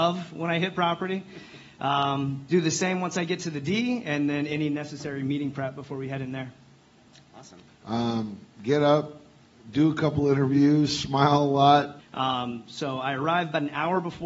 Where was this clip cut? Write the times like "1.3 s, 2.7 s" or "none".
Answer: 7.7 s, 12.0 s